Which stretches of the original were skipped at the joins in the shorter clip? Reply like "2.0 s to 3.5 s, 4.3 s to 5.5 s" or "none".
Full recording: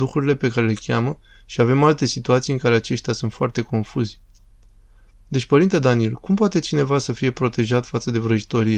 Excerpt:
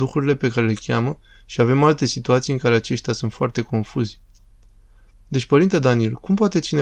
none